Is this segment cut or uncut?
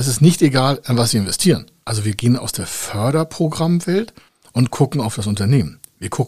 cut